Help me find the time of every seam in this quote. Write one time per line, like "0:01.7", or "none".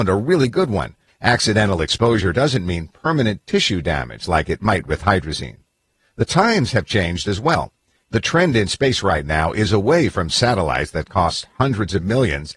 0:01.1